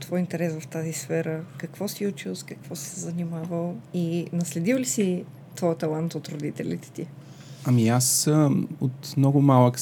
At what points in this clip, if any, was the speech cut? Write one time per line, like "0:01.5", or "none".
none